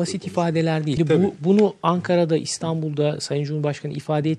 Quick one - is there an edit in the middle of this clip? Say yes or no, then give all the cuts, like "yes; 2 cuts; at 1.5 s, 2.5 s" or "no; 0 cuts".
yes; 1 cut; at 1.0 s